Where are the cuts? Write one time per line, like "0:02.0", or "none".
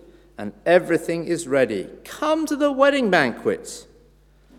none